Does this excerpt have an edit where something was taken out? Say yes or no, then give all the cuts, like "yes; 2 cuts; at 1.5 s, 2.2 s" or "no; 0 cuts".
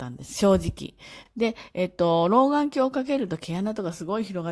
no; 0 cuts